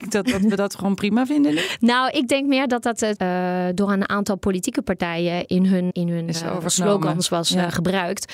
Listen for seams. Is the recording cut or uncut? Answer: cut